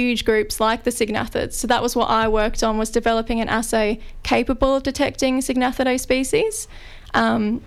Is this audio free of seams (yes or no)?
yes